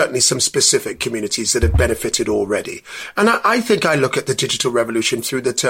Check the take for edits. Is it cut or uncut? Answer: uncut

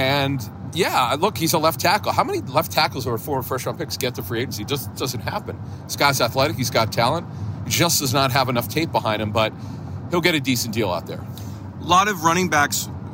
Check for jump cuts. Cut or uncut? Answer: cut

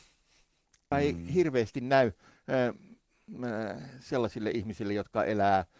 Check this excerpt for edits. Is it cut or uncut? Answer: cut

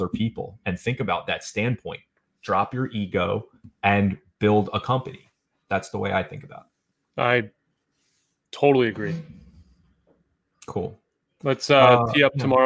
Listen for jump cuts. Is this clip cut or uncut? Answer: uncut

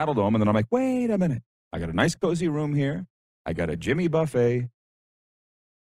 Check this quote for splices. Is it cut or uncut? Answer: uncut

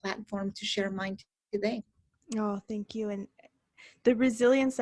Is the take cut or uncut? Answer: uncut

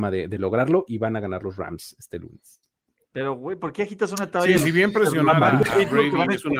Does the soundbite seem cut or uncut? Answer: cut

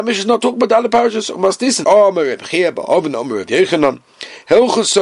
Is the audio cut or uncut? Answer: cut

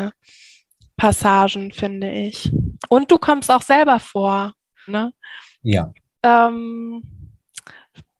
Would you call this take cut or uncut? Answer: cut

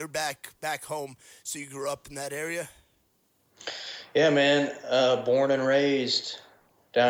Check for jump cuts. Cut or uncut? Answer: uncut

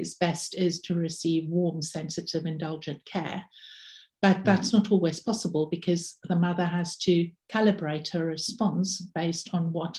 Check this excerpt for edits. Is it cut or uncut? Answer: uncut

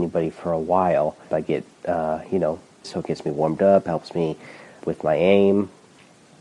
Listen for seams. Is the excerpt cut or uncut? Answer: cut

